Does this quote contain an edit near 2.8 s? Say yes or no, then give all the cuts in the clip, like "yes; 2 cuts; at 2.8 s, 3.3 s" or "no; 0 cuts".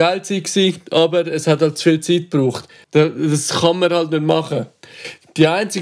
yes; 1 cut; at 2.8 s